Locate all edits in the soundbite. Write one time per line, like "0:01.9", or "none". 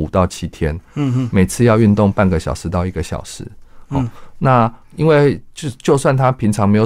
0:04.8